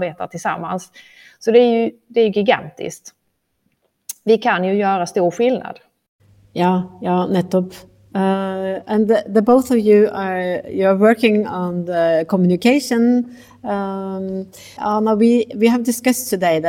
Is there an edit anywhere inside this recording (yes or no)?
yes